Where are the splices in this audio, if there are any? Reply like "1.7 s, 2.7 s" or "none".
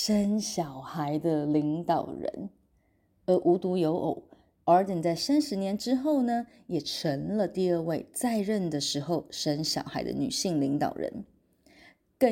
none